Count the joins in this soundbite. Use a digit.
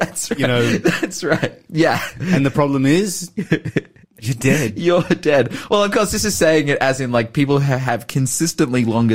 1